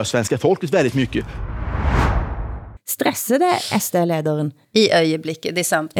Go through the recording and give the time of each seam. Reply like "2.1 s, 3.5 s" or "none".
2.8 s, 4.6 s